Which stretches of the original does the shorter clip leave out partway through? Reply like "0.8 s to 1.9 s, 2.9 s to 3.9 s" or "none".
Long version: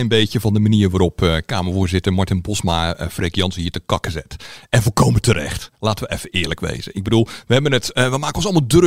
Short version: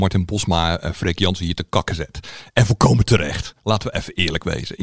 none